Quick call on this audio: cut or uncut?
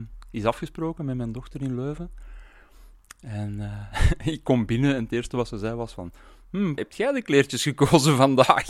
cut